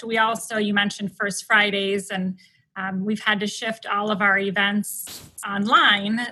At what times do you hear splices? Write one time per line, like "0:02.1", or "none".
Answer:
none